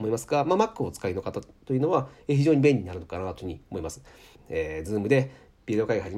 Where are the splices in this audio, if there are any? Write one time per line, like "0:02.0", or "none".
0:04.3

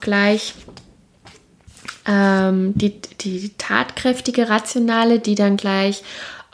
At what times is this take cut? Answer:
none

